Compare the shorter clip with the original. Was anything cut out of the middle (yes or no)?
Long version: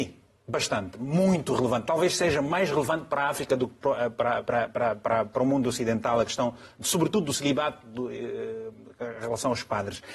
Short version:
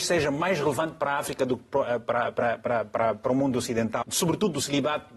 yes